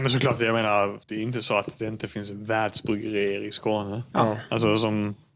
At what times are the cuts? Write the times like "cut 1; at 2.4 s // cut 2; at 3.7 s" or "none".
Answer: cut 1; at 1.0 s // cut 2; at 4.1 s